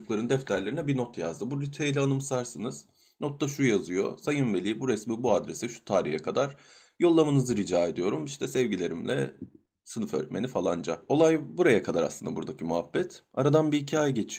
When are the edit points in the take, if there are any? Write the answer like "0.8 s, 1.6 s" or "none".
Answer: none

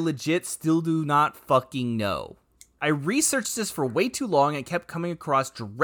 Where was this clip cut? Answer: 2.8 s

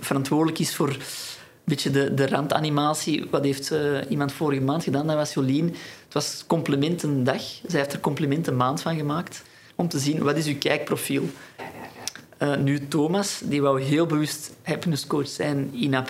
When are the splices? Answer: 9.7 s, 11.6 s

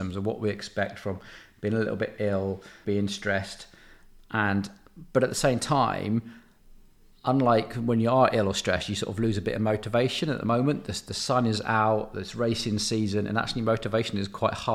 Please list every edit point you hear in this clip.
2.8 s

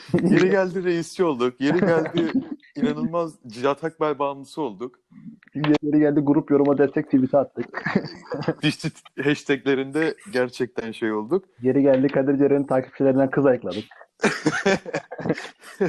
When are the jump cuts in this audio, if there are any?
5.8 s, 8.6 s

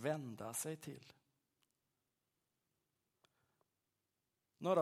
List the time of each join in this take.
none

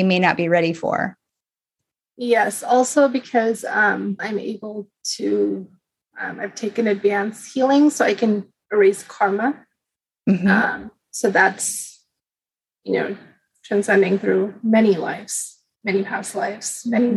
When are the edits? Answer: 4.2 s

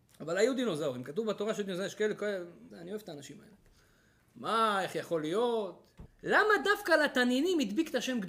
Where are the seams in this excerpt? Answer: 2.7 s, 6.1 s

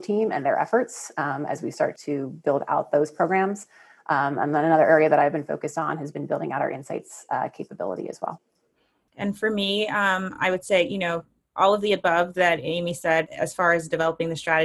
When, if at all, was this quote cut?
none

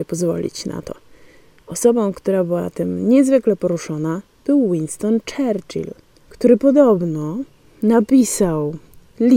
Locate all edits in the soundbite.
none

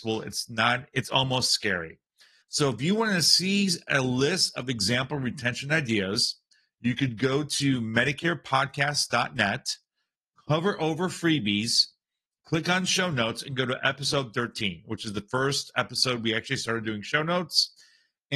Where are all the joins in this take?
2.4 s

